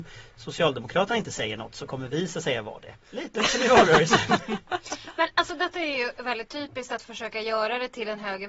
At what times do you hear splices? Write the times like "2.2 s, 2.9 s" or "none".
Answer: 3.0 s